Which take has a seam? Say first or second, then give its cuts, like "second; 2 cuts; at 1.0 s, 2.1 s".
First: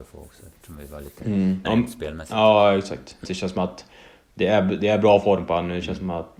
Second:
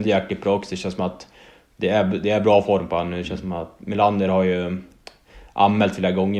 first; 2 cuts; at 1.6 s, 3.2 s